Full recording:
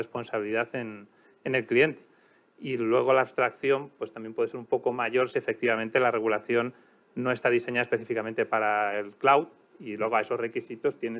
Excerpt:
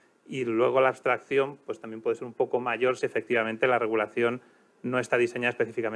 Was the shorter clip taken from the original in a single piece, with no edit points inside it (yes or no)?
yes